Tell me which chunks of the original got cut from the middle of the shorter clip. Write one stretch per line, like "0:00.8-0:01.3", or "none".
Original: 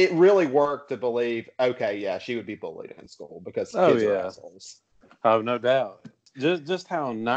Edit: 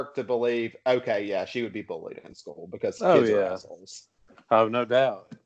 none